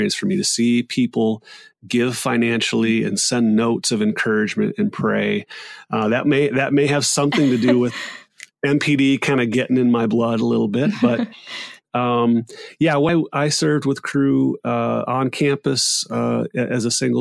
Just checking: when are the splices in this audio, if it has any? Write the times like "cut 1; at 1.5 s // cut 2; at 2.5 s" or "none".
cut 1; at 5.9 s // cut 2; at 13.1 s